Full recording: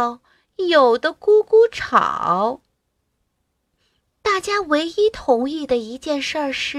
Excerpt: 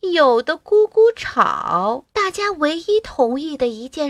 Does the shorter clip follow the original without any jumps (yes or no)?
no